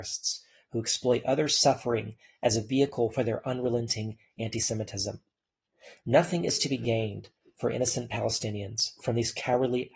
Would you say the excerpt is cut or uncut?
uncut